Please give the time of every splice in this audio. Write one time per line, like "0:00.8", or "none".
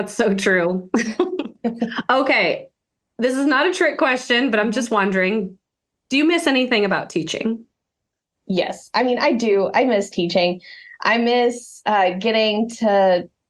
none